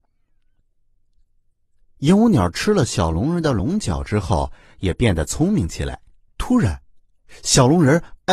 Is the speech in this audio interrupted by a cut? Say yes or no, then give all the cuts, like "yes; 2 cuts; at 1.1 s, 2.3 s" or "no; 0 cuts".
yes; 1 cut; at 6.3 s